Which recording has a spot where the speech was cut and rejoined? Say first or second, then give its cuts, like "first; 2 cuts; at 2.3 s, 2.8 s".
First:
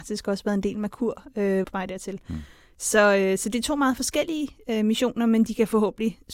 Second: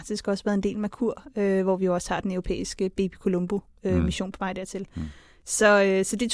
first; 1 cut; at 1.6 s